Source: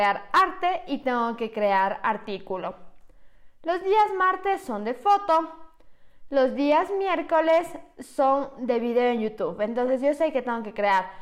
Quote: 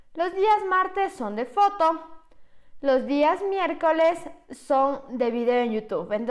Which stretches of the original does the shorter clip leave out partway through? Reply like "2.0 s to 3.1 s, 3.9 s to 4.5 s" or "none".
none

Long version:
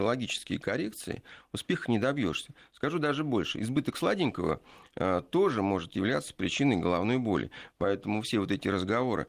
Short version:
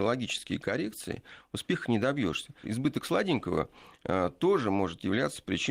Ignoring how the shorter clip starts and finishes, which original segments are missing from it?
2.6 s to 3.5 s

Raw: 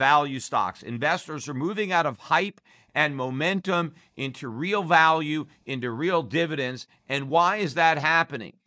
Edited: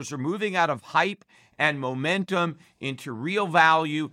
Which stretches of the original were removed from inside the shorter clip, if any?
none

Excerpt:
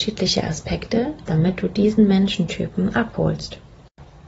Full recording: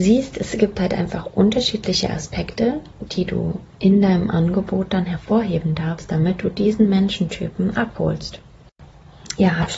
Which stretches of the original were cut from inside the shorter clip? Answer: 2.9 s to 6.1 s

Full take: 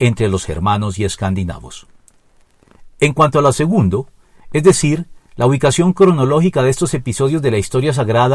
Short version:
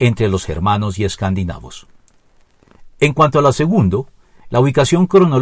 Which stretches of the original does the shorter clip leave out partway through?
4.5 s to 5.3 s

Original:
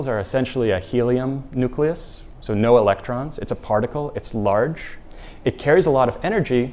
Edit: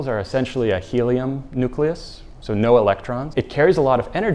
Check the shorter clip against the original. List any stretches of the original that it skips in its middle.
3.3 s to 5.4 s

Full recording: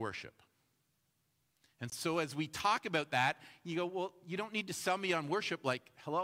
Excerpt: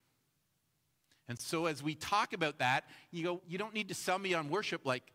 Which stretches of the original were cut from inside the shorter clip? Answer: 3.9 s to 4.2 s

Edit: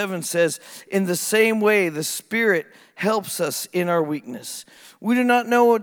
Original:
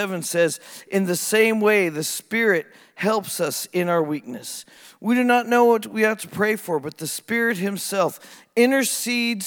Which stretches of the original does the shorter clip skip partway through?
none

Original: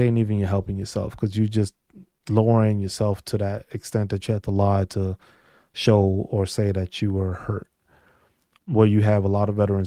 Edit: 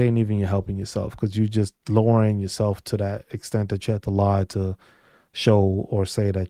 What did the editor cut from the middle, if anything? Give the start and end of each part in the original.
1.8 s to 2.2 s

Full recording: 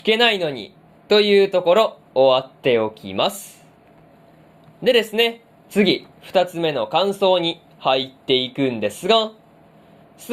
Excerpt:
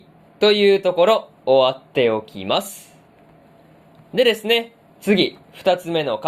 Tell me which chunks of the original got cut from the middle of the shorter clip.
none

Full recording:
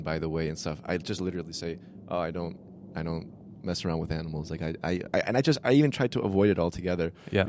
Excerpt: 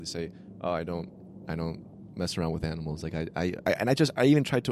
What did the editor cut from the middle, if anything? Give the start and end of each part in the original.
none

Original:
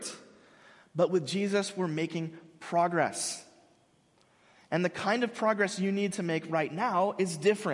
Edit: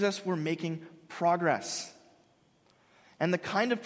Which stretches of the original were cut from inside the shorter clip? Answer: none

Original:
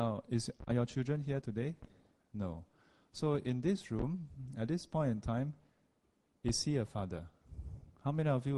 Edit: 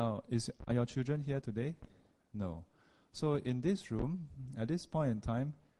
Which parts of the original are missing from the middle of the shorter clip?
none

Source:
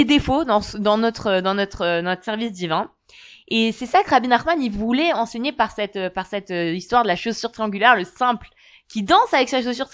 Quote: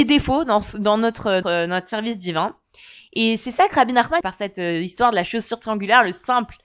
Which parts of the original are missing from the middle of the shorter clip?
1.4 s to 1.8 s, 4.6 s to 6.1 s

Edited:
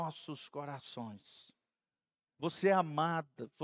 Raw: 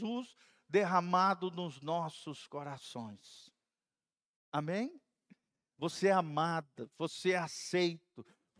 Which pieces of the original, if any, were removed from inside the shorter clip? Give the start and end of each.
4.2 s to 5.7 s

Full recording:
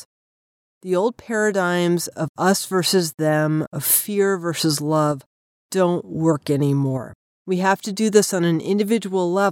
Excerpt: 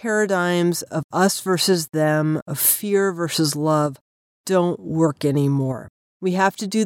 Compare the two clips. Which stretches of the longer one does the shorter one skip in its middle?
none

